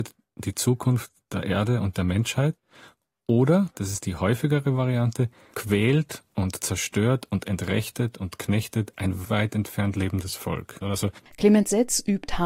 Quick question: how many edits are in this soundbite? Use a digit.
2